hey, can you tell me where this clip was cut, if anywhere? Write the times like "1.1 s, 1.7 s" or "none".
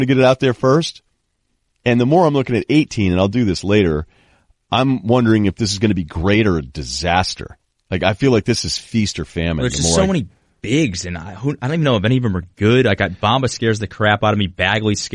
1.7 s